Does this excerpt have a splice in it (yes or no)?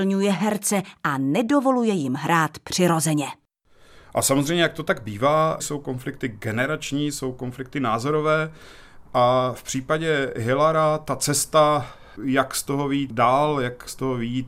no